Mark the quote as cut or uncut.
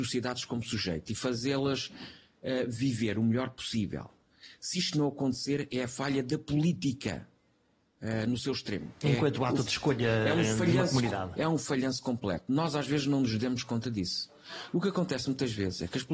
uncut